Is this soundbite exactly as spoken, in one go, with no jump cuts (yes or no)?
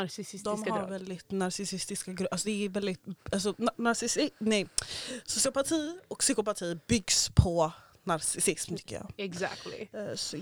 yes